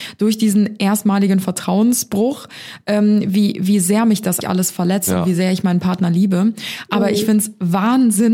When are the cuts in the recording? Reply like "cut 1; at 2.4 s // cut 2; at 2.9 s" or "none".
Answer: cut 1; at 4.4 s